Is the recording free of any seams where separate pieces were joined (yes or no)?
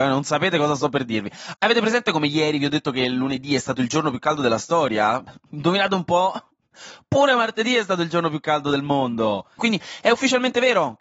no